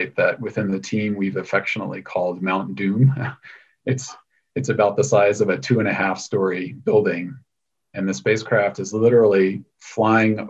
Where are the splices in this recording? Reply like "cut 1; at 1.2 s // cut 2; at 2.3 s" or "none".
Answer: none

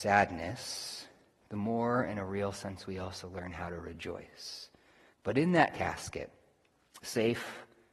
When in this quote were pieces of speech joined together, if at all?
cut 1; at 5.1 s

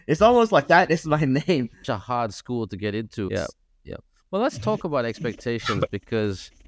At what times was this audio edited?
cut 1; at 1.8 s // cut 2; at 3.3 s

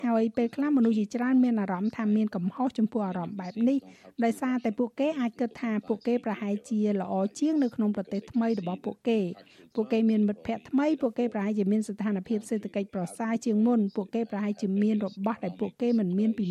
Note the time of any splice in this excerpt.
none

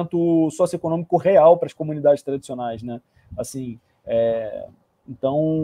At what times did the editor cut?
none

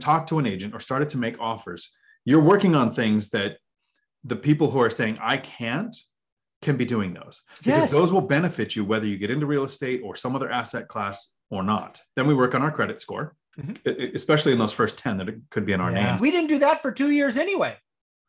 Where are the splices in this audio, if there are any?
cut 1; at 12.1 s // cut 2; at 13.5 s // cut 3; at 16.2 s

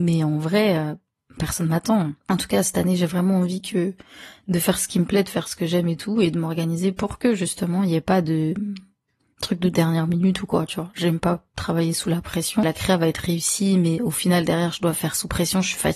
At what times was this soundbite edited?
none

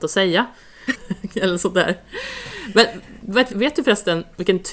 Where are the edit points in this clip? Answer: cut 1; at 0.9 s // cut 2; at 3.5 s

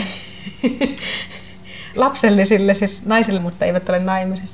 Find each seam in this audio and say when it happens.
cut 1; at 1.9 s // cut 2; at 3.4 s

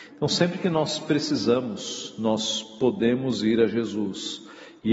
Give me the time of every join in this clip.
none

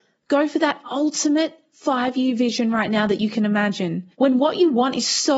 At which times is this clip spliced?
cut 1; at 4.1 s

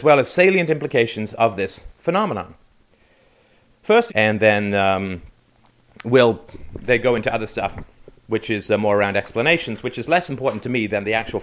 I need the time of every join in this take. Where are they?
cut 1; at 4.1 s

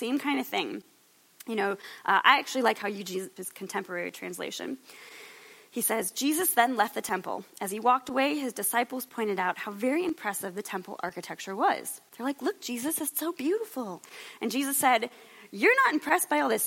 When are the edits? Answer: cut 1; at 3.4 s

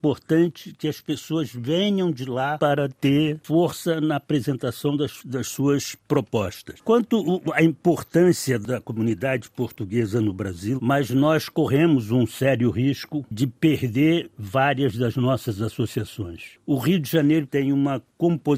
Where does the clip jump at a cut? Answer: cut 1; at 10.8 s // cut 2; at 17.5 s

